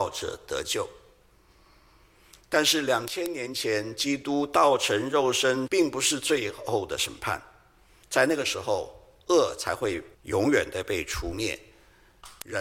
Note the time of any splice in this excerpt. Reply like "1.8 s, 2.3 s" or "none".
5.7 s, 8.0 s, 10.1 s

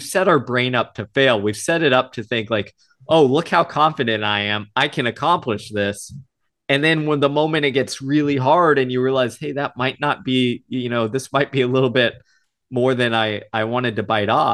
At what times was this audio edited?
none

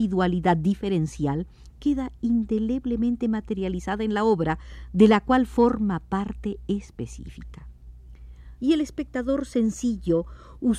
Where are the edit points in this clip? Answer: 8.6 s

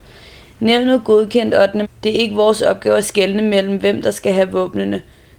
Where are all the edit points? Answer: 1.8 s

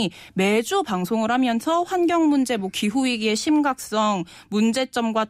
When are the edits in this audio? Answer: none

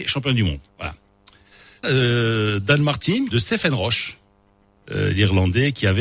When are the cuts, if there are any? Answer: 1.8 s, 3.3 s, 4.8 s

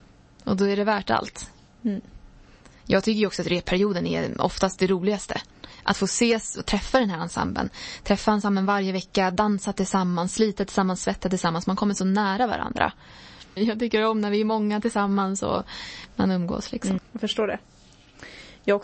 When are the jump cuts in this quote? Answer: 13.6 s, 17.0 s

